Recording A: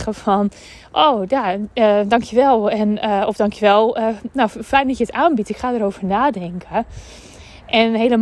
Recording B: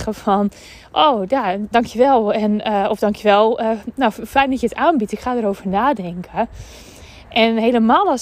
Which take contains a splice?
B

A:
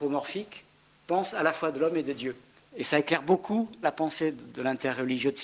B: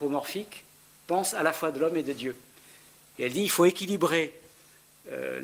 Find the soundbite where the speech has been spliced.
A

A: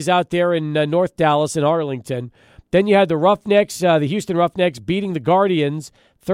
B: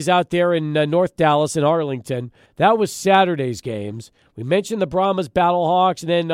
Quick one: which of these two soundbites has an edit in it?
B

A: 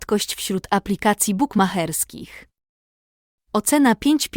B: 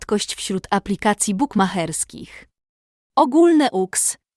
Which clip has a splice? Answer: B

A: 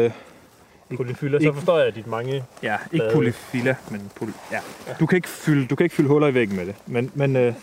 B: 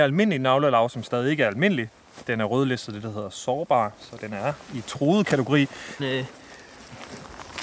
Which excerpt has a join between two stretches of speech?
B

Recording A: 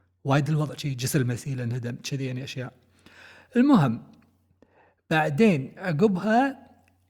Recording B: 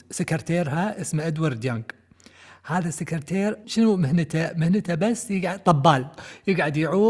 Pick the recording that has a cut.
B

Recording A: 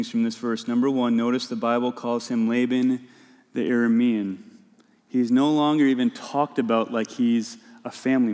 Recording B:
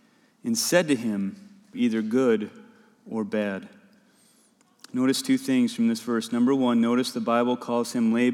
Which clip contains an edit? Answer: B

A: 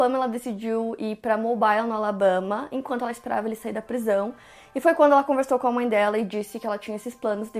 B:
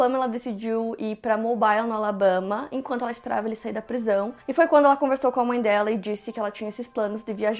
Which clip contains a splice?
B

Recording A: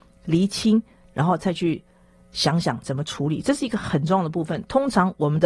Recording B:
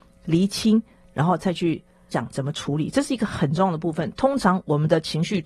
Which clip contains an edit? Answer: B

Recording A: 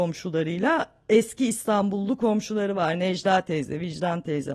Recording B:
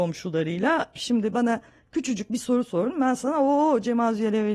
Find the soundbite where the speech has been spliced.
B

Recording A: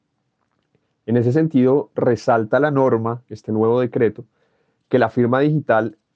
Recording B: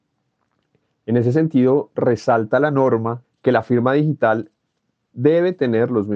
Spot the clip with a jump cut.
B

